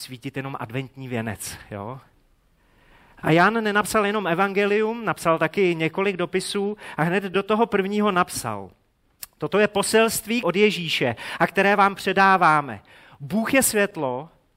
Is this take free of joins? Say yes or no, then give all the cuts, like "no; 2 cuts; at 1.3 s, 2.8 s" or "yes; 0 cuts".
no; 2 cuts; at 3.2 s, 10.4 s